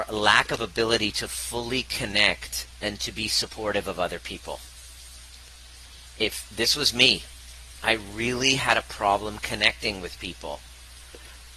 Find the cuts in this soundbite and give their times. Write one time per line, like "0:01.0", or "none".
none